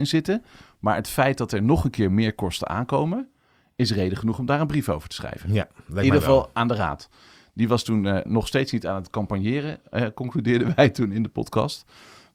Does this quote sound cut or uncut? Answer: cut